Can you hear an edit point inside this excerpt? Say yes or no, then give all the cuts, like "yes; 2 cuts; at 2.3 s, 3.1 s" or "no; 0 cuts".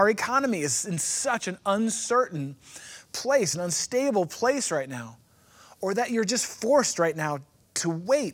no; 0 cuts